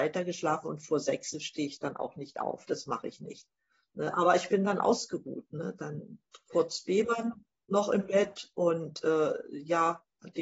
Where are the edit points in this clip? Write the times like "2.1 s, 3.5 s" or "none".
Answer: none